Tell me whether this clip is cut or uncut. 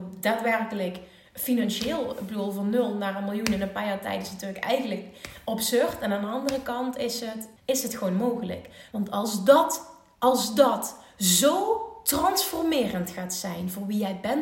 cut